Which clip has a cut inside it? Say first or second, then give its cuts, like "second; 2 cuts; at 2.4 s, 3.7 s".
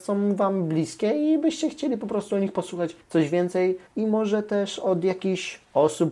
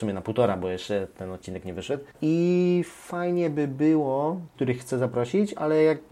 second; 1 cut; at 4.5 s